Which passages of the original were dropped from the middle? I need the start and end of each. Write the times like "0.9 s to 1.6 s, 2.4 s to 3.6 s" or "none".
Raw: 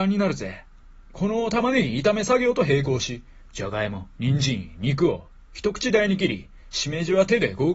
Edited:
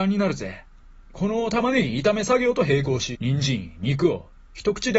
3.2 s to 4.1 s